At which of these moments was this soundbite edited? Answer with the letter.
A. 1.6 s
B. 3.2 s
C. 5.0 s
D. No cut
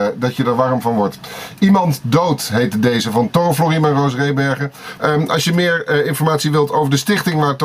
C